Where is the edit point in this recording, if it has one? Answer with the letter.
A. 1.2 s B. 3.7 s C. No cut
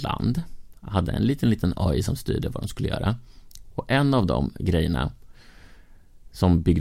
C